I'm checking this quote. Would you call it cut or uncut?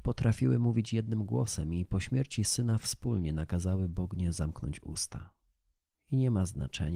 cut